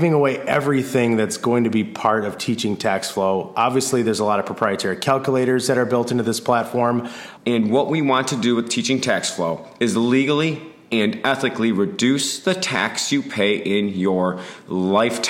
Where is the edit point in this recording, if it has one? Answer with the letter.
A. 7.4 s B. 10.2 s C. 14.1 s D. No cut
A